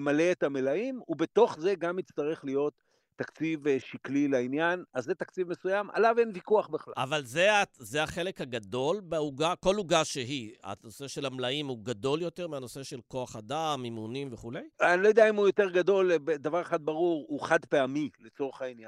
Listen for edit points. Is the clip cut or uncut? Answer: cut